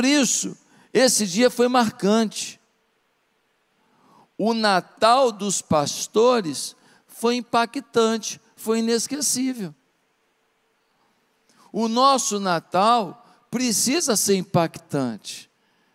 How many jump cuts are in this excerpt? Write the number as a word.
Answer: zero